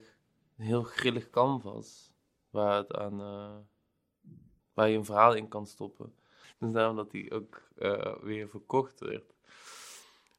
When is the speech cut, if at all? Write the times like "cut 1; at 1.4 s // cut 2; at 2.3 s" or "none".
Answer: cut 1; at 4.6 s // cut 2; at 6.5 s